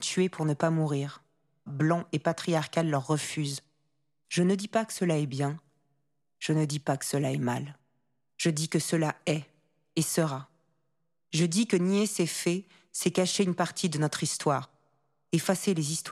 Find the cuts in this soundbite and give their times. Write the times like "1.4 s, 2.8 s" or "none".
1.7 s